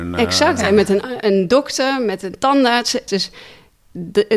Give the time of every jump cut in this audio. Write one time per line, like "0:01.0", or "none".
0:03.1